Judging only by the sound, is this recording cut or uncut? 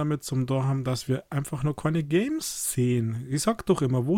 uncut